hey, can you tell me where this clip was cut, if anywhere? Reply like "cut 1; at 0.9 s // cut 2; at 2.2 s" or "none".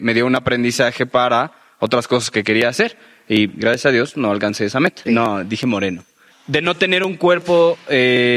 cut 1; at 5.0 s // cut 2; at 6.3 s